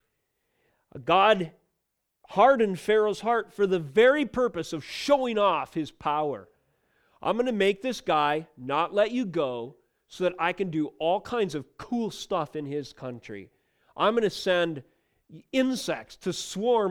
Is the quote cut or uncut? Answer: uncut